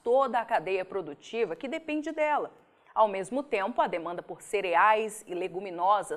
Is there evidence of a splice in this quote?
no; 0 cuts

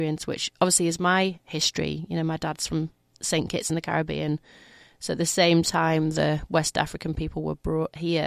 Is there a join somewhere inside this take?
no; 0 cuts

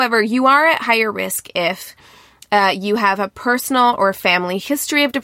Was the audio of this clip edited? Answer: no; 0 cuts

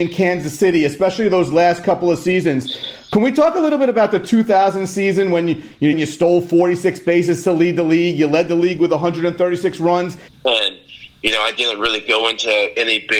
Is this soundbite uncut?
no; 2 cuts; at 5.9 s, 10.3 s

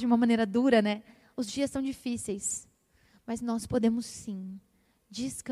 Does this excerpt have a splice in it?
no; 0 cuts

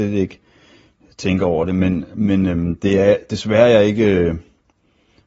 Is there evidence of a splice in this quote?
no; 0 cuts

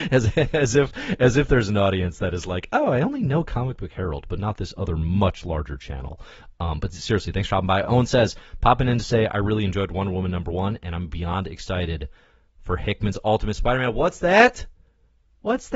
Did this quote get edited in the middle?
no; 0 cuts

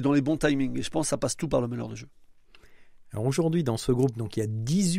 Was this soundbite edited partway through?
no; 0 cuts

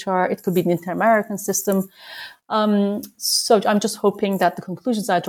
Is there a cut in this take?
no; 0 cuts

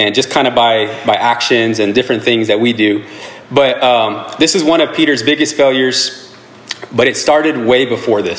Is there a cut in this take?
no; 0 cuts

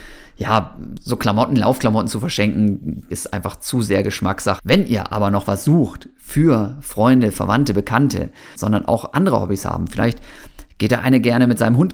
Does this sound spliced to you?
yes; 3 cuts; at 3.1 s, 4.6 s, 8.6 s

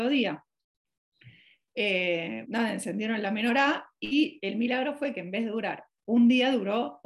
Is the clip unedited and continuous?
no; 1 cut; at 2.4 s

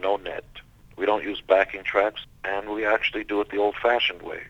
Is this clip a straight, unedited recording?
no; 1 cut; at 2.2 s

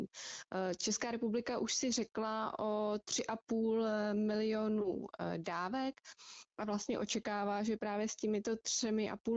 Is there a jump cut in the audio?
no; 0 cuts

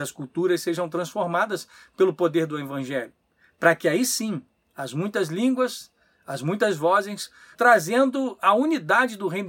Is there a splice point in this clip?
yes; 1 cut; at 7.5 s

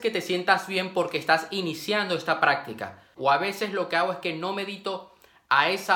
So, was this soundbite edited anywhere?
yes; 1 cut; at 3.2 s

